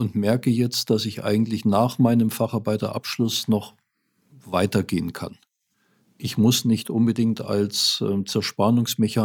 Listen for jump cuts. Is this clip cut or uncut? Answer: uncut